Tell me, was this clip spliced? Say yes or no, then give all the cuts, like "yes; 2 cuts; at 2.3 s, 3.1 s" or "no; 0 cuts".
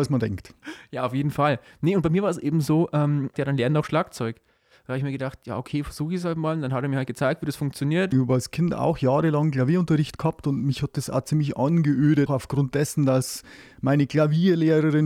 yes; 3 cuts; at 3.3 s, 8.1 s, 12.3 s